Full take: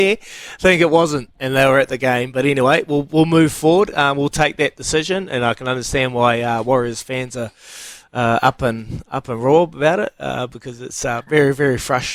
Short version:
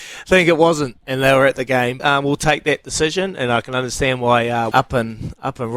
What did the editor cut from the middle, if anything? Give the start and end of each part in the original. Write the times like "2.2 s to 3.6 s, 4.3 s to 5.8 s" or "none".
2.3 s to 3.9 s, 6.6 s to 8.4 s

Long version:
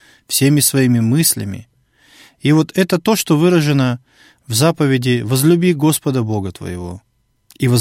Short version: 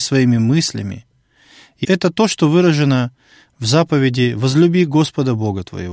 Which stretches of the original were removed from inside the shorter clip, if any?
2.5 s to 2.7 s

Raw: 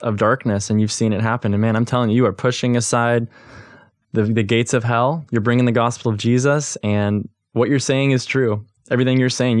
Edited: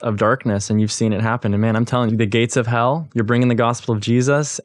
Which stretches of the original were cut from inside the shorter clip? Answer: 2.1 s to 4.3 s

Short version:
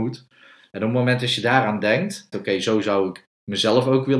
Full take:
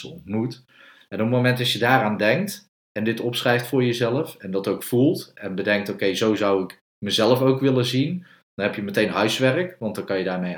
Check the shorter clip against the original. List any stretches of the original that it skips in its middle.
2.7 s to 5.9 s

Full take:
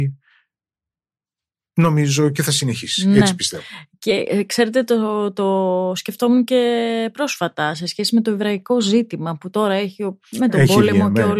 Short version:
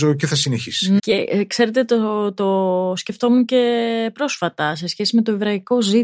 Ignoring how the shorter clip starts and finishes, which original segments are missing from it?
3.1 s to 4.0 s

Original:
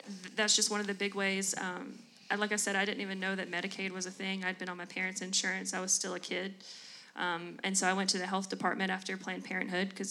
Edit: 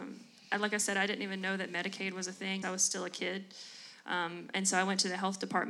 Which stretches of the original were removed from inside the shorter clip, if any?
4.4 s to 5.7 s

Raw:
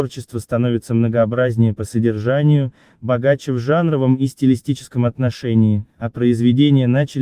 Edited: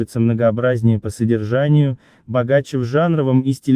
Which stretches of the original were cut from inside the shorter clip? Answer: none

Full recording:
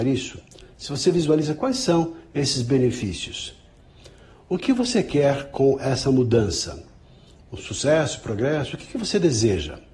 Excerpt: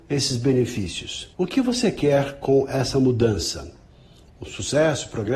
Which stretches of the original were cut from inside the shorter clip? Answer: 3.6 s to 4.5 s

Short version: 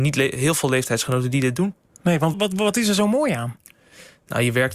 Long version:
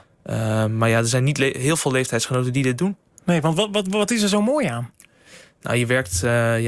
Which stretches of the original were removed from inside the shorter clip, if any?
3.6 s to 3.7 s

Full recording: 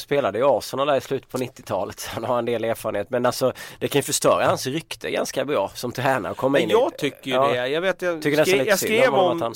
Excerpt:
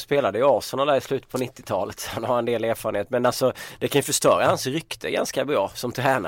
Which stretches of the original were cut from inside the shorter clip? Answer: none

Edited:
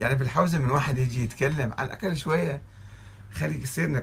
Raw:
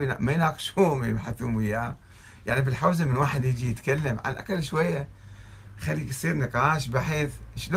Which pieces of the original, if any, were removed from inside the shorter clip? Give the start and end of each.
none

